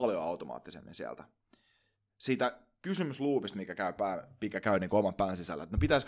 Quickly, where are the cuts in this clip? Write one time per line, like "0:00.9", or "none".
none